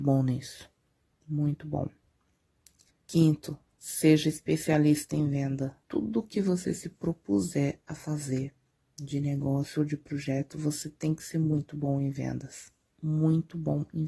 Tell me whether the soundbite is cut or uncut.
cut